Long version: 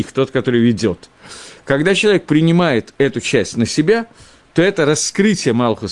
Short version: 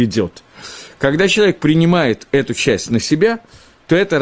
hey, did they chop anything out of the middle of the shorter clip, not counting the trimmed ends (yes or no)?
no